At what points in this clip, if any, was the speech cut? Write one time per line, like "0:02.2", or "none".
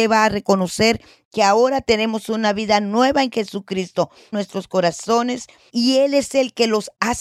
0:04.3
0:05.7

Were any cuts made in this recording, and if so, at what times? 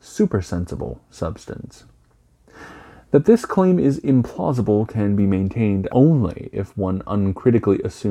0:05.9

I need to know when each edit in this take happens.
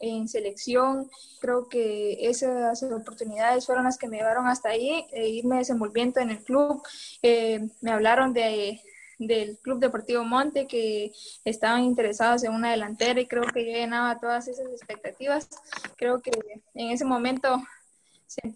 0:01.4
0:05.1

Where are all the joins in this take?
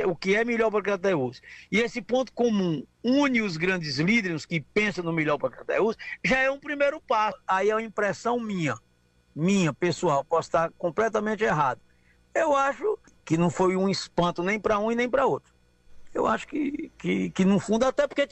none

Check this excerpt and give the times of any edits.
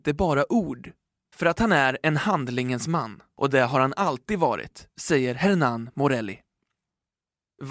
0:01.3

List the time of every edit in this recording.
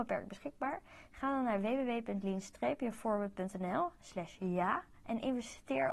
none

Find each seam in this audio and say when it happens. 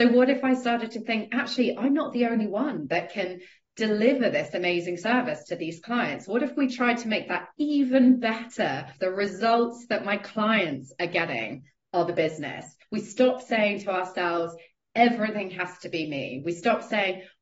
0:09.0
0:12.8

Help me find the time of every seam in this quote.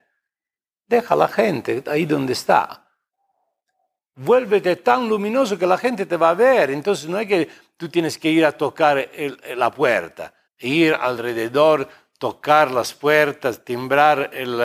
0:10.5

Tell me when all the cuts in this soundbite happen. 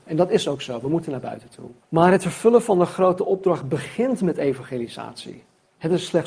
0:01.8

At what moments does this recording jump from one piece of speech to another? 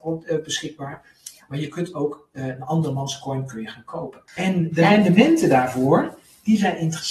0:04.3

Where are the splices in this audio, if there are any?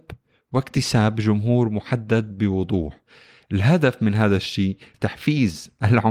0:04.9

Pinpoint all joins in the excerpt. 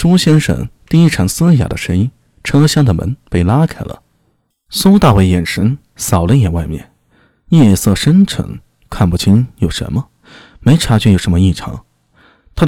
none

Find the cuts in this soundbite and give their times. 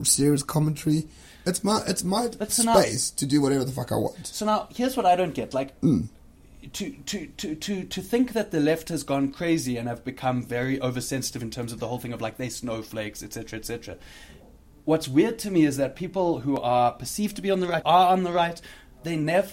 0:17.8

